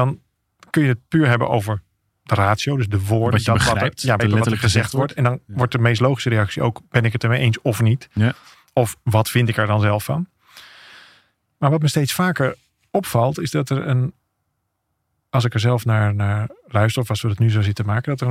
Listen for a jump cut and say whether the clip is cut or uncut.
cut